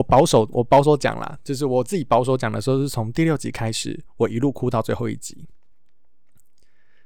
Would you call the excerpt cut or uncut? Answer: uncut